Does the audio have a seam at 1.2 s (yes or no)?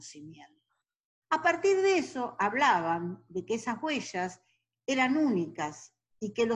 yes